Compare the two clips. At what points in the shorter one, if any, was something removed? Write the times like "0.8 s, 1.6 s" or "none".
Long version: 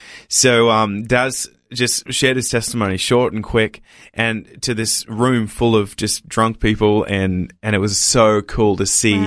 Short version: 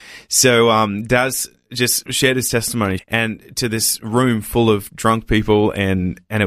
3.0 s, 4.9 s